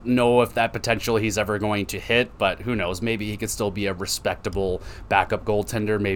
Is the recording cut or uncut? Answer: uncut